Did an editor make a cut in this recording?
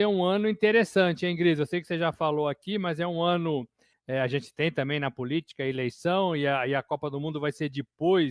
yes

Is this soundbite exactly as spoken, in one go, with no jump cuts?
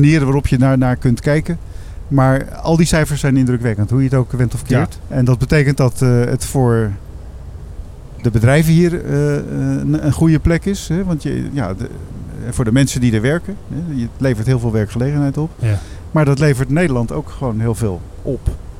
no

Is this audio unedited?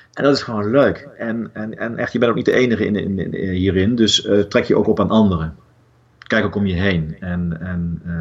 yes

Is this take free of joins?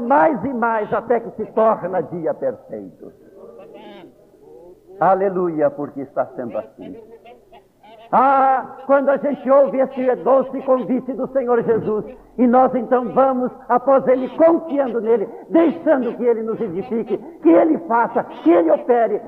yes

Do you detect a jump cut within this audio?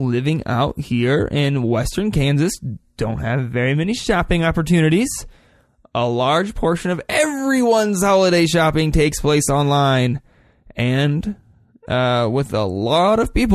no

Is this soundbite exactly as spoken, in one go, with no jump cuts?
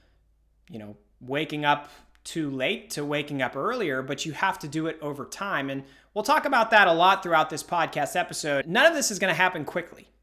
no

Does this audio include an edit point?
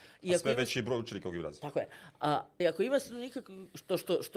yes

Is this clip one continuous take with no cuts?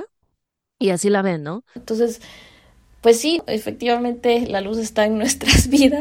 no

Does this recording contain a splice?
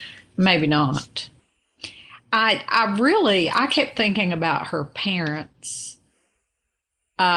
no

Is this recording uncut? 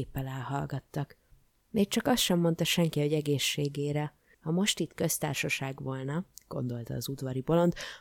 no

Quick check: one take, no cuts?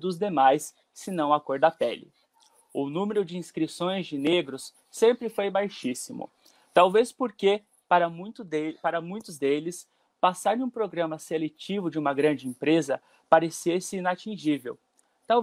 yes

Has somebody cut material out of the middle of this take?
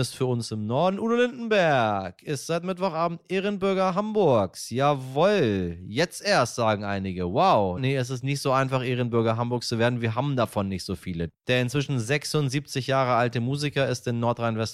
yes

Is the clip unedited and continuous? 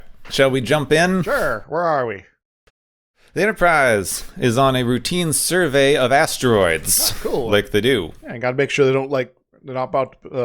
yes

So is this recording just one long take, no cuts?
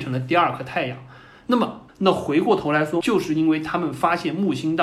no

